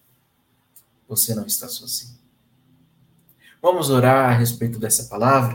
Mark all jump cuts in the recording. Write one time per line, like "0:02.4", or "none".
0:00.9